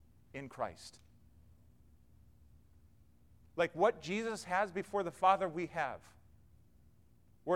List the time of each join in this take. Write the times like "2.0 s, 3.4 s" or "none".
none